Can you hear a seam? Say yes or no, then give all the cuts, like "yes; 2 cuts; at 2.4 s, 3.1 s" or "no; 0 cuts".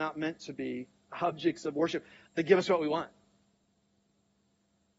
yes; 1 cut; at 2.3 s